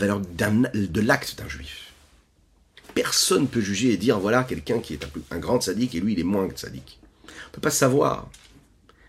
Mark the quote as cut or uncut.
uncut